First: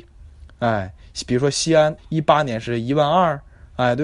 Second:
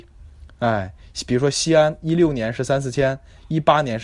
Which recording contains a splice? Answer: first; 1 cut; at 2.0 s

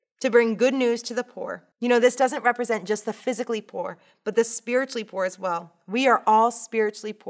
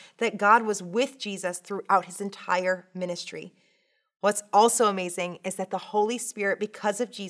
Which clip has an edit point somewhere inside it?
first; 1 cut; at 1.7 s

